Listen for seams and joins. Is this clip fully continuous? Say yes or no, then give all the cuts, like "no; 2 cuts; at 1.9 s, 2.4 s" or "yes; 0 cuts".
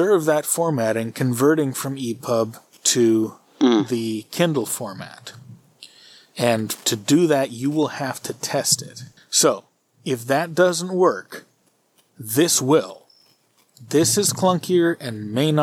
yes; 0 cuts